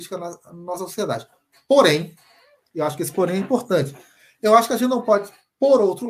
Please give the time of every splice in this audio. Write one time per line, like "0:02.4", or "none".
none